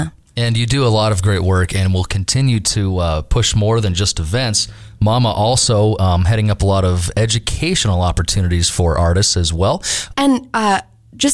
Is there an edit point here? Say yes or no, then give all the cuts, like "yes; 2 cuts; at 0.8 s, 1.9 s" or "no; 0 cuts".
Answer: yes; 1 cut; at 10.1 s